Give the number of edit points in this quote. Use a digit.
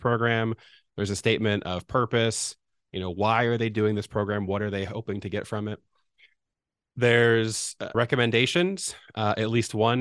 1